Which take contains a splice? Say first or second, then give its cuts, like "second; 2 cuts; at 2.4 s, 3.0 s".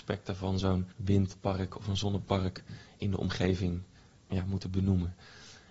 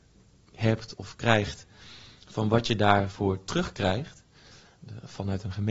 first; 1 cut; at 0.9 s